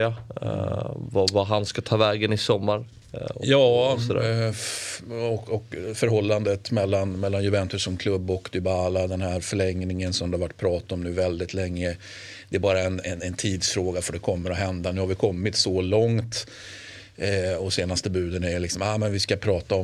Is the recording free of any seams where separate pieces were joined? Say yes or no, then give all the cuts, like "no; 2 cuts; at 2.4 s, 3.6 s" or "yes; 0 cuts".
no; 1 cut; at 13.0 s